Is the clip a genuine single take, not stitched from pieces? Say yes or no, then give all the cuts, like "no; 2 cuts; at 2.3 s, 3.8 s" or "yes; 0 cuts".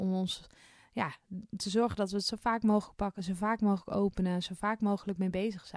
yes; 0 cuts